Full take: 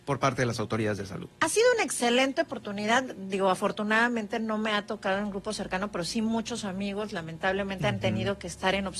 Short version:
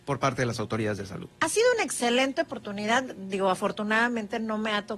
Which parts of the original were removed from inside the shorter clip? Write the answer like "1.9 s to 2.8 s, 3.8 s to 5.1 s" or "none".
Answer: none